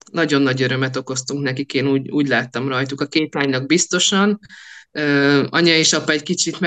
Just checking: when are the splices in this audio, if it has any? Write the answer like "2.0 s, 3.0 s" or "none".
none